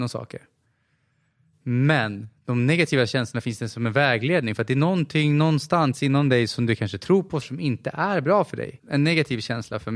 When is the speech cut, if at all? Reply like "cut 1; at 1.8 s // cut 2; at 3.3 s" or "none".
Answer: cut 1; at 7.4 s // cut 2; at 8.8 s